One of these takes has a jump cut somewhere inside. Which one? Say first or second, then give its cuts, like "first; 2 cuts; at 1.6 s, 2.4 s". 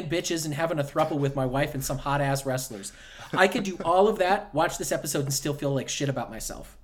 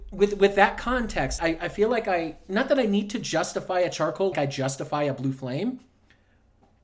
second; 2 cuts; at 1.4 s, 4.3 s